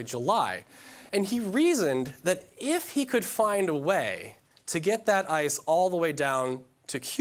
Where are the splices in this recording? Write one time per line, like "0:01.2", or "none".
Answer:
0:01.1